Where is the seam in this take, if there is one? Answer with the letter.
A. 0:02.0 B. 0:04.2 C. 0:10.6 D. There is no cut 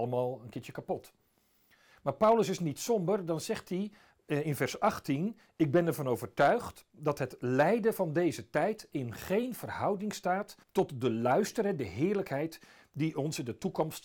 C